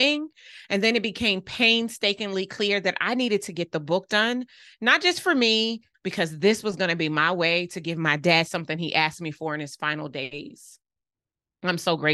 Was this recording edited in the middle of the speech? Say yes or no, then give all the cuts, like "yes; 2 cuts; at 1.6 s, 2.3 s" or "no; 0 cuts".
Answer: yes; 1 cut; at 5.9 s